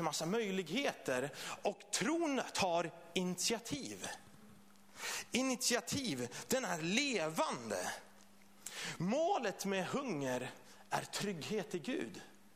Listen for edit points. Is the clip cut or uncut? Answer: uncut